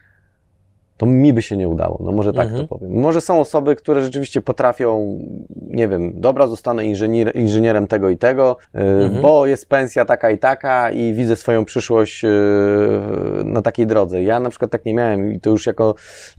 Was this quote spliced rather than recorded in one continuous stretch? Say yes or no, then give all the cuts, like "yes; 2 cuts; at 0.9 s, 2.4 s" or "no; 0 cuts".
yes; 1 cut; at 8.6 s